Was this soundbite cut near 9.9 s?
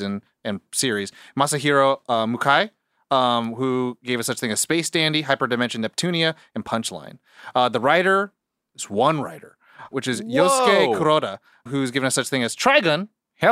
yes; 2 cuts; at 9.9 s, 11.7 s

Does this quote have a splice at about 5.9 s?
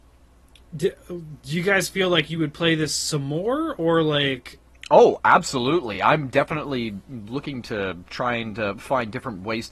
no; 0 cuts

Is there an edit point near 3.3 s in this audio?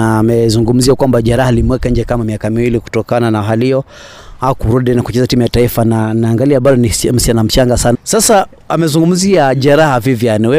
no; 1 cut; at 7.9 s

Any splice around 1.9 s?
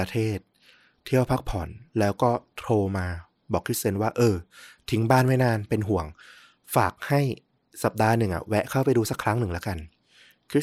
yes; 1 cut; at 1.9 s

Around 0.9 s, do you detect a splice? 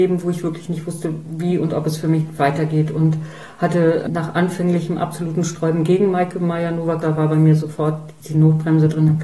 no; 1 cut; at 7.0 s

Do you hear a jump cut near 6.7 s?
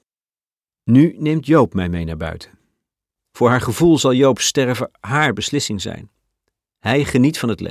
no; 1 cut; at 3.1 s

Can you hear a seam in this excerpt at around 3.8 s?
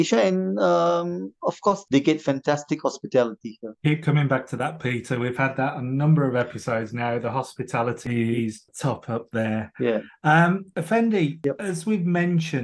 yes; 1 cut; at 3.8 s

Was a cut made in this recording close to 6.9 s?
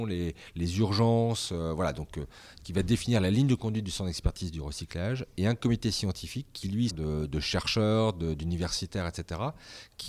yes; 1 cut; at 6.9 s

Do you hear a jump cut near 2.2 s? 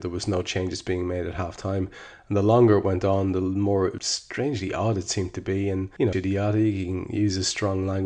no; 1 cut; at 6.1 s

